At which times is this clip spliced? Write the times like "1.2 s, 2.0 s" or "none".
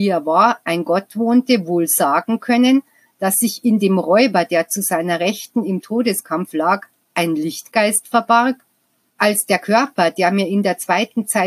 9.1 s

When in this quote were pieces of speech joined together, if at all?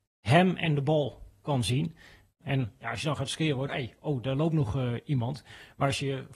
2.4 s, 3.7 s

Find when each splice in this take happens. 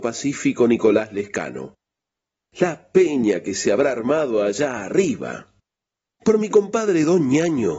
6.1 s

